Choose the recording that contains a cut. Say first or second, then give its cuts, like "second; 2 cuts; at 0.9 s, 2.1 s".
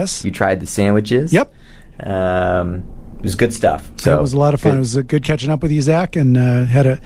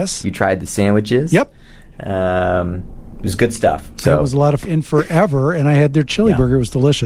second; 1 cut; at 4.6 s